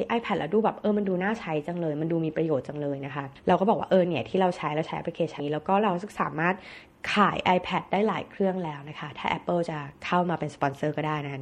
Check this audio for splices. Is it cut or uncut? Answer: cut